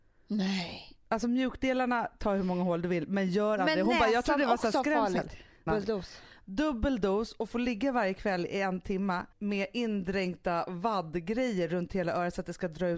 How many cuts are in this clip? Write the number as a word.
two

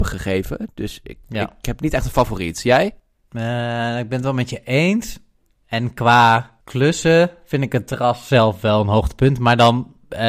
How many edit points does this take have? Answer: zero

